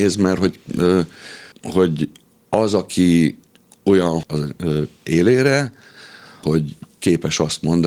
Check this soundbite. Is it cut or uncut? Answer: cut